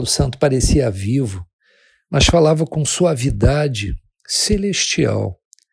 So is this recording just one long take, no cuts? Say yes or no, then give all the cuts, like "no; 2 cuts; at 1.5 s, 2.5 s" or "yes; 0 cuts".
yes; 0 cuts